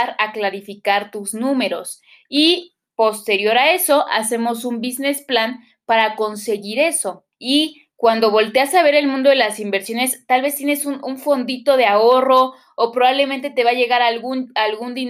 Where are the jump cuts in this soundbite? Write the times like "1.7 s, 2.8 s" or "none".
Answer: 7.3 s